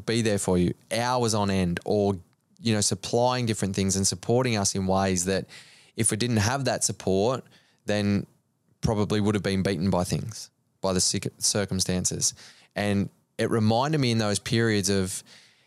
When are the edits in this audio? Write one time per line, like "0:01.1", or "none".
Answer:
0:12.6

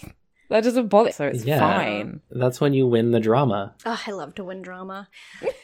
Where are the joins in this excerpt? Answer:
0:01.1
0:03.8

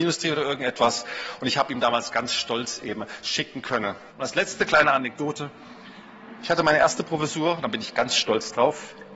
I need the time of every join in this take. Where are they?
0:04.1

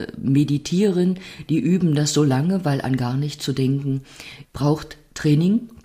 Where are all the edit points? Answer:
0:04.4

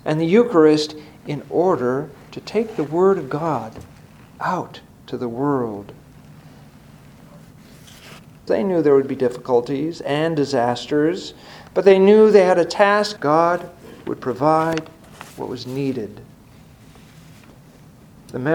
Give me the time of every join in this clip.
0:08.5
0:13.2
0:15.3

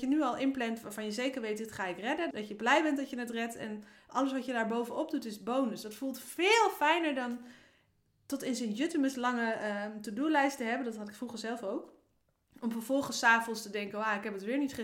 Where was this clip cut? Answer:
0:02.3

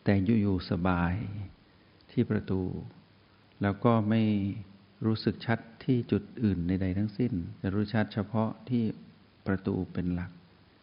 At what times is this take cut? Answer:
0:07.6

